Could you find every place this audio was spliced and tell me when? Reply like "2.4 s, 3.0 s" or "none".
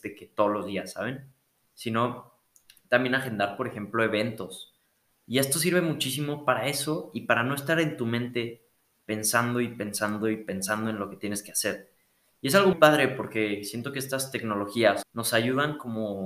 5.1 s, 12.7 s, 15.0 s